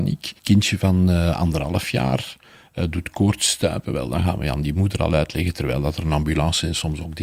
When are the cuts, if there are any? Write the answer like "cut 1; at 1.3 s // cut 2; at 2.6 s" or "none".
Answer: none